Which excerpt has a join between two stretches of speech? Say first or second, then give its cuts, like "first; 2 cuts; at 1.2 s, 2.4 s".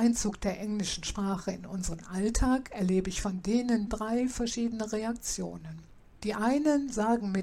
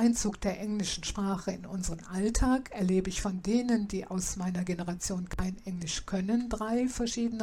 first; 1 cut; at 3.9 s